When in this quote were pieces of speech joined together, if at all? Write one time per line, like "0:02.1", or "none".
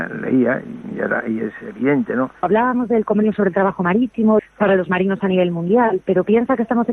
0:02.4
0:04.4

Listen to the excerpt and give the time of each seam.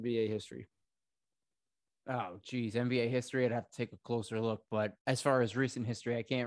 0:05.0

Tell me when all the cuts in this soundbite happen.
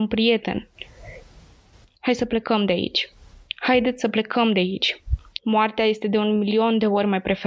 0:05.4

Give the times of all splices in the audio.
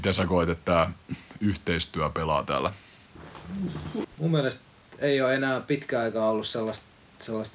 0:04.0

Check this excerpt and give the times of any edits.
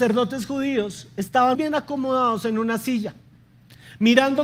0:01.5

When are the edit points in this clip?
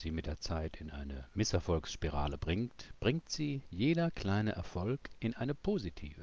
0:02.9

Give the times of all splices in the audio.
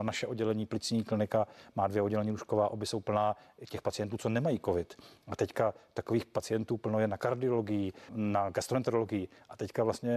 0:08.1

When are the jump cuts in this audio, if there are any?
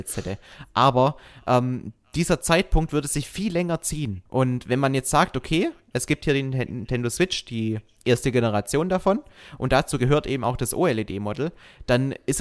0:04.3

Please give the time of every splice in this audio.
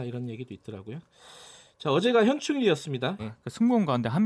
0:03.2

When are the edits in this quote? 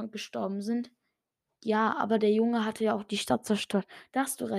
none

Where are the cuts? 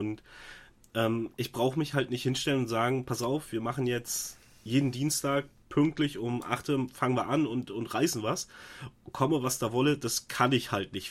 none

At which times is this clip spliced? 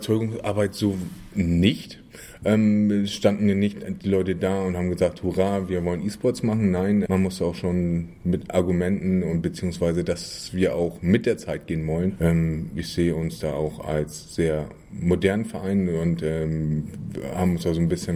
0:07.1

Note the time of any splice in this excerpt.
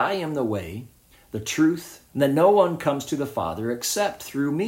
0:02.1

